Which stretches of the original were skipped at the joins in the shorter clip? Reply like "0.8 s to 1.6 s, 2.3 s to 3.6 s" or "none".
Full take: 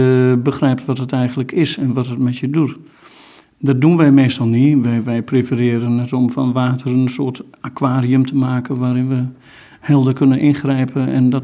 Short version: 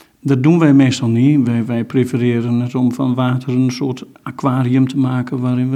none